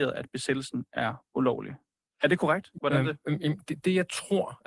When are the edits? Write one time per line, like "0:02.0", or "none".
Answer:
0:02.8

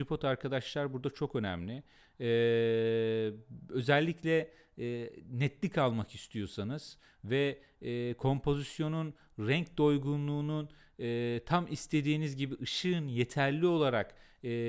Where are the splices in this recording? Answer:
none

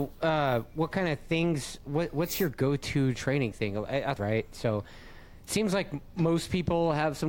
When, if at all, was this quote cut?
0:04.2

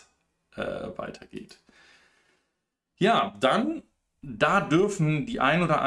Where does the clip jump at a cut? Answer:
none

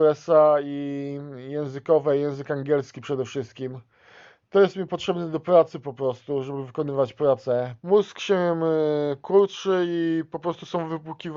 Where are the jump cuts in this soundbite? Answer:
0:07.8

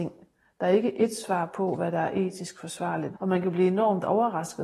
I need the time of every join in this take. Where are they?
0:03.1

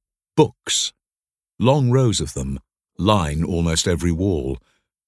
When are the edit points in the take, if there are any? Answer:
none

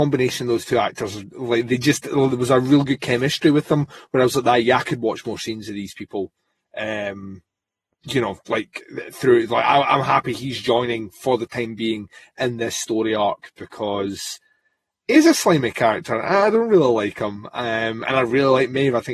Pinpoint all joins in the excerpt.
none

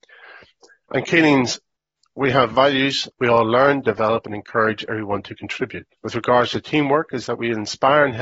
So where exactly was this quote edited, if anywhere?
0:03.1
0:06.0

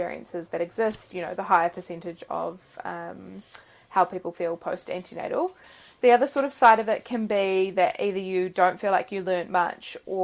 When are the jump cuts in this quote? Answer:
0:01.1

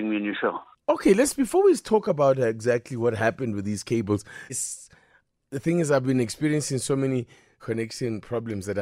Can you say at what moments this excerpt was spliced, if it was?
0:04.5
0:07.6

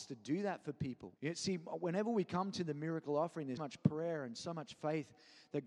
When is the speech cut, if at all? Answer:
0:01.2
0:03.6

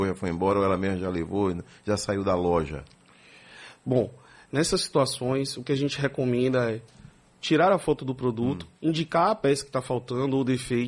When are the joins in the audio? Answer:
none

